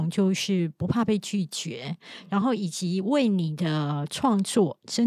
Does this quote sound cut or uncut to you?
uncut